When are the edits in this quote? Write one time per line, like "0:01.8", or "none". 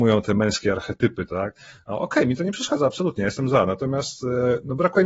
none